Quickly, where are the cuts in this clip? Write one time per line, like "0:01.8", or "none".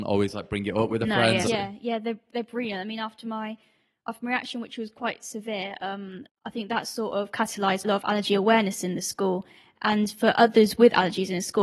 0:01.5
0:06.3
0:07.8